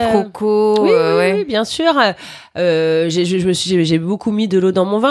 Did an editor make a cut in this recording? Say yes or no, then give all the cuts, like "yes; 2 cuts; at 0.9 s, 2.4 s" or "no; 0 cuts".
no; 0 cuts